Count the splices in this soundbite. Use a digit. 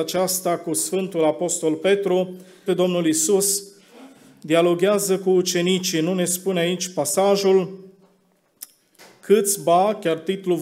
1